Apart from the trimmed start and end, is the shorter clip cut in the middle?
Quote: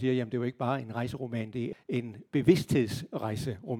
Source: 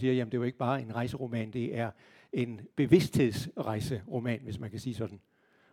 yes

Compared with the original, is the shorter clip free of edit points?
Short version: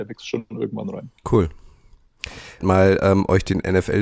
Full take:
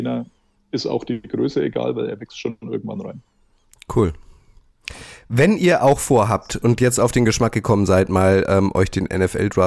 no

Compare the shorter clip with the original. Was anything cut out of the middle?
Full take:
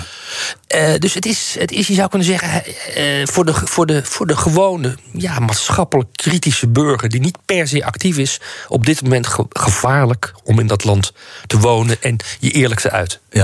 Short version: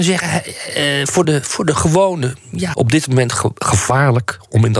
yes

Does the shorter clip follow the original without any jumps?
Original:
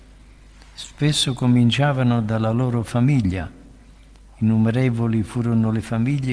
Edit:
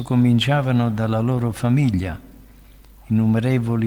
yes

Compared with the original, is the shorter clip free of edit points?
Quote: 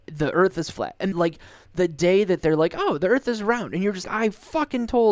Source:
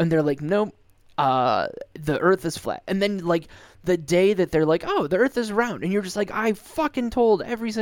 no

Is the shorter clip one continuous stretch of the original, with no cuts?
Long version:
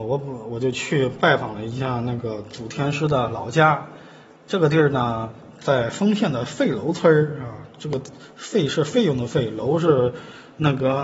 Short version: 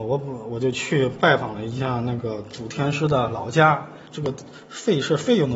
no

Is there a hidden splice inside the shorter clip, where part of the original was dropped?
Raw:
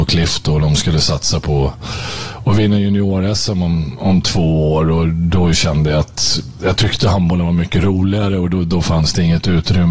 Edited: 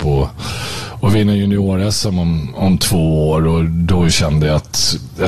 no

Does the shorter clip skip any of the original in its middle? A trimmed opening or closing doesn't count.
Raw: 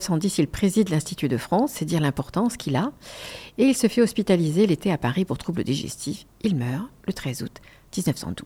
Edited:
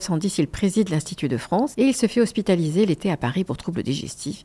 yes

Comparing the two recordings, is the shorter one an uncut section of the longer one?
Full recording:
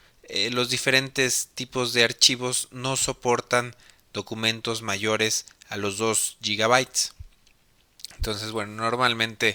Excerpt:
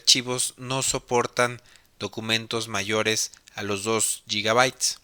yes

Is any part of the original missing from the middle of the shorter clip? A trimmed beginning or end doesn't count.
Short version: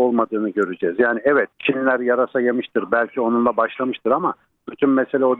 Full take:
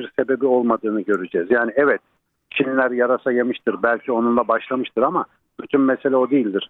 yes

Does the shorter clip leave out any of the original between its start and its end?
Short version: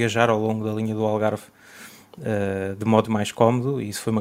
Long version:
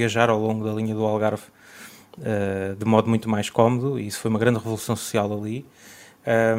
yes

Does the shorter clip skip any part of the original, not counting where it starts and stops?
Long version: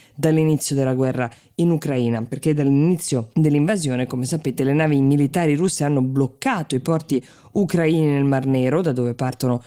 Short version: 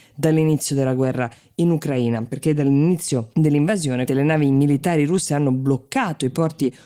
yes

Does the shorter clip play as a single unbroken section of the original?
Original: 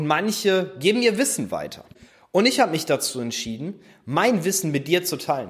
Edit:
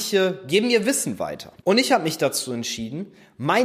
no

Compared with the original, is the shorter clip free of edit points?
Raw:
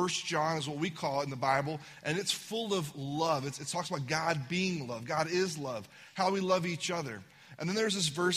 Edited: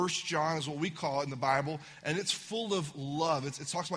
yes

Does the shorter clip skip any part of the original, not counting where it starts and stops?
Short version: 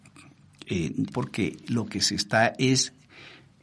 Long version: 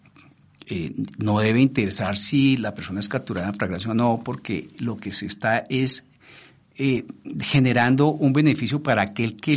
yes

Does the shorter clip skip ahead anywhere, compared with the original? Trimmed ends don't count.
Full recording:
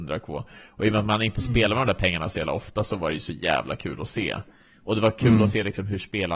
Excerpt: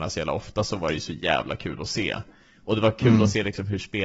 no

